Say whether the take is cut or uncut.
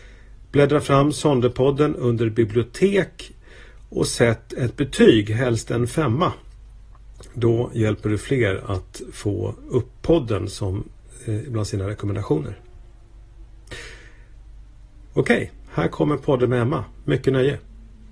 uncut